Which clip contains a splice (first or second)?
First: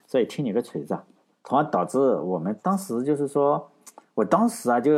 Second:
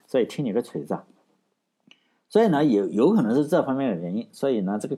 first